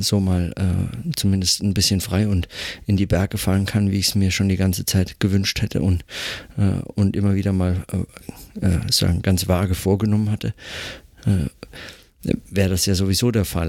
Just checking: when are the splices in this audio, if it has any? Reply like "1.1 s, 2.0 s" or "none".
none